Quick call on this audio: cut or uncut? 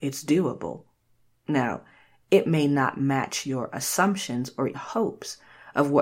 cut